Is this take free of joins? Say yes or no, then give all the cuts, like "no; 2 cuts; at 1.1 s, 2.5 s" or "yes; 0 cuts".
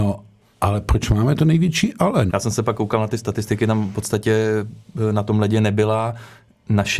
no; 1 cut; at 2.3 s